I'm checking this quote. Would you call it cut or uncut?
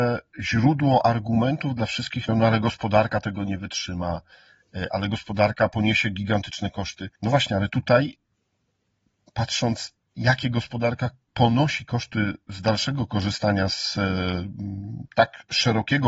cut